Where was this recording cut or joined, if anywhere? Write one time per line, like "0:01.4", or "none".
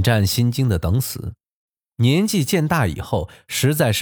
none